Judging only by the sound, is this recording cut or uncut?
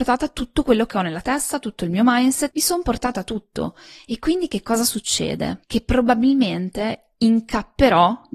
uncut